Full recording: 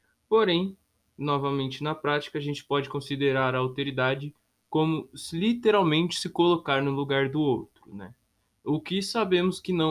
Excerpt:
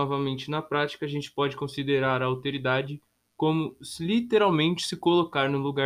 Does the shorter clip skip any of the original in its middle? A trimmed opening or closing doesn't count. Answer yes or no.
no